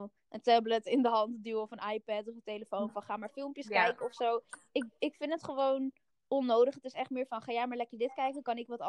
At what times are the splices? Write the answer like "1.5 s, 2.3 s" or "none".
none